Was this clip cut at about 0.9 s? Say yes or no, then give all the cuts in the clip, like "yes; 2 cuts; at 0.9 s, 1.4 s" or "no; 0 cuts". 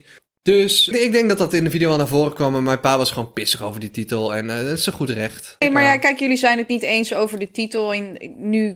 yes; 2 cuts; at 0.9 s, 5.6 s